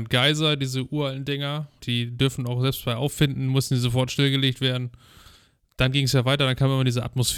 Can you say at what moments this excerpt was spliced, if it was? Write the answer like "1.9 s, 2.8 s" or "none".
1.8 s